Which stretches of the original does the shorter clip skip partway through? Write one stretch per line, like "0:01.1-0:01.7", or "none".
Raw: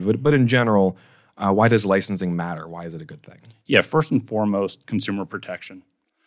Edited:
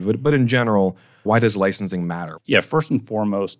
0:01.3-0:01.5
0:02.7-0:03.6